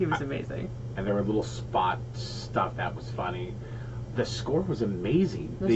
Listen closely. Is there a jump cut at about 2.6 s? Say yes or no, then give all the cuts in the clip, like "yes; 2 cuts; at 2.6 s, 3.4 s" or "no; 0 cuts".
no; 2 cuts; at 1.0 s, 4.1 s